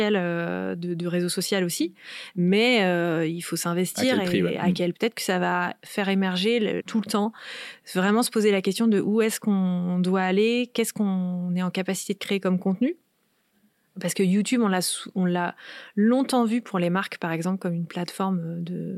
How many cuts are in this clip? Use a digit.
2